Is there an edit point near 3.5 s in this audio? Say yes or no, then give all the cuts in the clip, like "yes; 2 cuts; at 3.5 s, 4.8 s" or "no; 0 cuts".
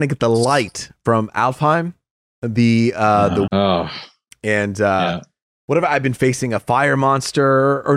yes; 1 cut; at 3.5 s